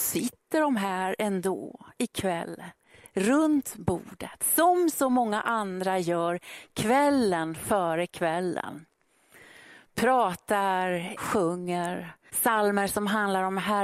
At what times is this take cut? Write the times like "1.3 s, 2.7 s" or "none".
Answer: 11.2 s, 12.3 s